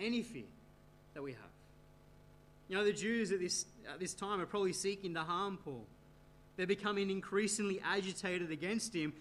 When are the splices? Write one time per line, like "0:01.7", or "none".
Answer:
none